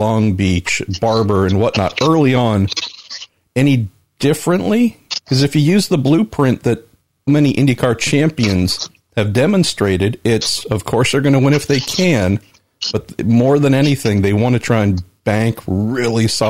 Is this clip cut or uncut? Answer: cut